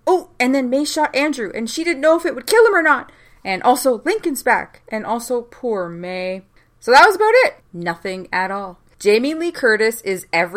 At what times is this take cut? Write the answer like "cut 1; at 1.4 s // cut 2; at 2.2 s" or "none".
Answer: cut 1; at 7.6 s // cut 2; at 8.9 s